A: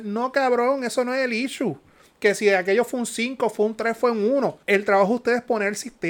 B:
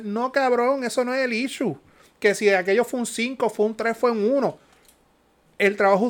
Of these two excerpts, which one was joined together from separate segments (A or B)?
A